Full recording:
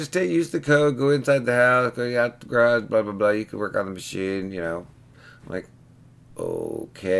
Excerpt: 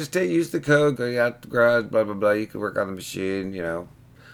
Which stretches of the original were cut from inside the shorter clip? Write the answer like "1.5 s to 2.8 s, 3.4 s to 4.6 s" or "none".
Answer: 1.0 s to 1.9 s